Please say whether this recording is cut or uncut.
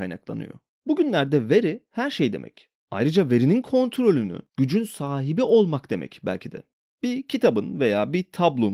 cut